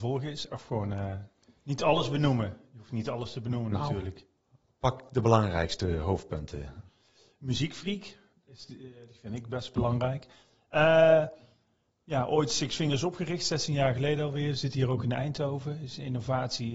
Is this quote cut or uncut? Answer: uncut